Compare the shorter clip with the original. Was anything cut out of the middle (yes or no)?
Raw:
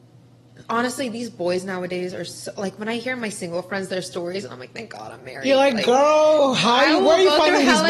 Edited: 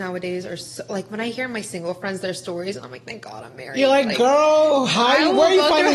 no